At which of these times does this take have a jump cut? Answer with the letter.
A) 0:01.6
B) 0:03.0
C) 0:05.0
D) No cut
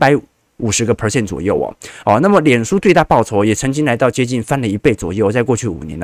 D